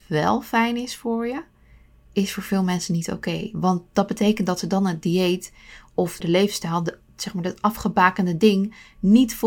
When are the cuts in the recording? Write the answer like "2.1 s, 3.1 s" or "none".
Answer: 6.2 s